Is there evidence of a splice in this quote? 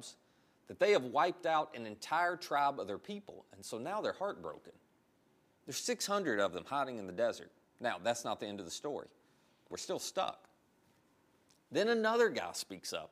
yes; 3 cuts; at 5.6 s, 7.7 s, 9.7 s

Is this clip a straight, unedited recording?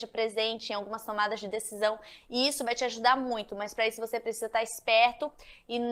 yes; 0 cuts

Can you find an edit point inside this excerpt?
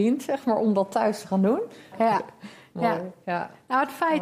yes; 1 cut; at 1.9 s

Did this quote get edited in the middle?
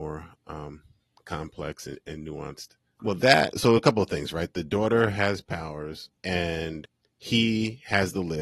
yes; 2 cuts; at 3.0 s, 6.2 s

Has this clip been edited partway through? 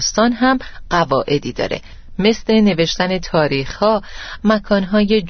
yes; 1 cut; at 4.4 s

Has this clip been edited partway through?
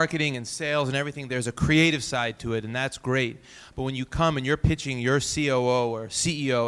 no; 0 cuts

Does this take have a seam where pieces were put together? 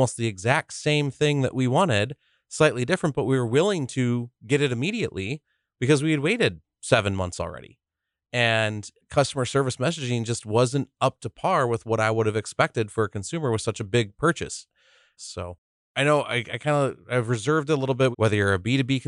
yes; 2 cuts; at 15.2 s, 18.1 s

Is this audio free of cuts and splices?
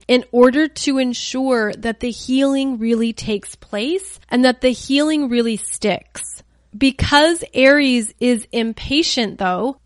yes; 0 cuts

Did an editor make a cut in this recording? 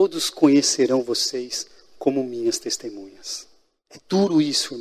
no; 0 cuts

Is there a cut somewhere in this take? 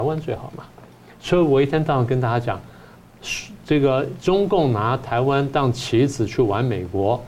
no; 0 cuts

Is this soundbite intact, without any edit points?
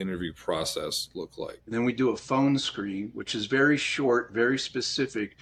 no; 1 cut; at 1.6 s

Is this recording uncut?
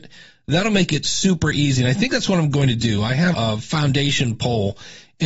no; 1 cut; at 3.3 s

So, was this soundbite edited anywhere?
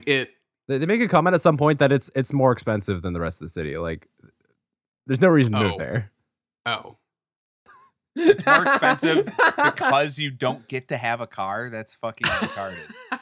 no; 0 cuts

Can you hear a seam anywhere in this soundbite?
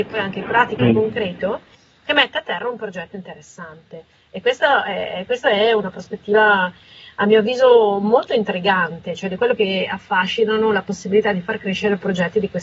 yes; 1 cut; at 9.6 s

